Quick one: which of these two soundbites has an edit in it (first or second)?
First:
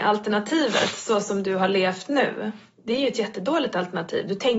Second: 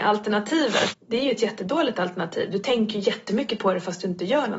second